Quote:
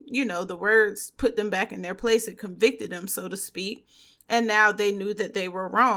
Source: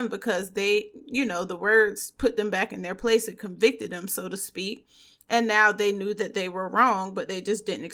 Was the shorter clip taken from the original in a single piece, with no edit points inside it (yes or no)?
yes